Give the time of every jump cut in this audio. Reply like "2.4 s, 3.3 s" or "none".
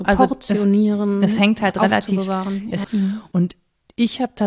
2.8 s